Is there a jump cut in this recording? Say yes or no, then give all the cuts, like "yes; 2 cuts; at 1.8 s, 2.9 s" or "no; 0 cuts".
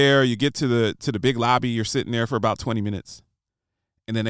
no; 0 cuts